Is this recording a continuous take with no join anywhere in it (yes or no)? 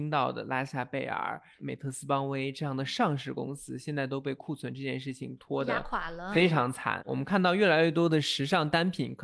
no